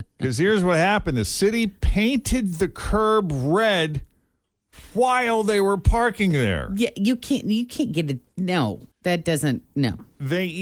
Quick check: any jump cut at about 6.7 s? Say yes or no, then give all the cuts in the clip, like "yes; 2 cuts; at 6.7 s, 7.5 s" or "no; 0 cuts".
no; 1 cut; at 8.9 s